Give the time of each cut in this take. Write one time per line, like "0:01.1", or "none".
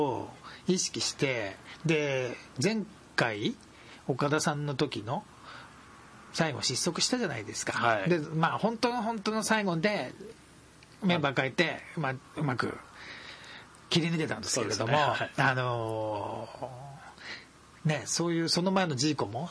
none